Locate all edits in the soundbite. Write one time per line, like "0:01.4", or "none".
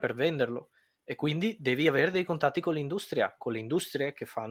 none